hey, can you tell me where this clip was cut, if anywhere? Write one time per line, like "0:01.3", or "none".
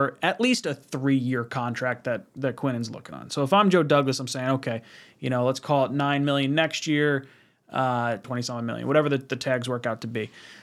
0:08.2